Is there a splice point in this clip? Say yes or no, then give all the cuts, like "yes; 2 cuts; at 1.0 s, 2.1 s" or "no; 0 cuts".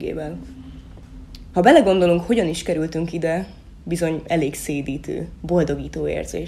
yes; 1 cut; at 1.5 s